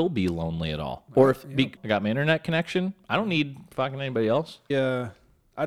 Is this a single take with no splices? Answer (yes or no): no